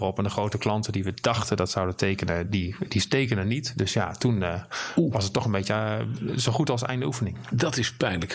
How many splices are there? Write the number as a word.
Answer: zero